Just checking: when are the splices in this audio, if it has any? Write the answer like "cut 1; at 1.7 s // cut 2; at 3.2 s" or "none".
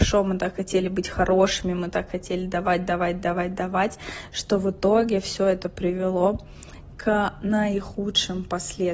none